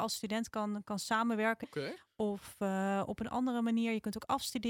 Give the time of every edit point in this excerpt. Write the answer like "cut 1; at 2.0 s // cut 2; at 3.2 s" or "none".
cut 1; at 1.6 s